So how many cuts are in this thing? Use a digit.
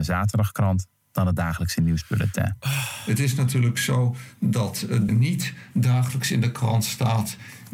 1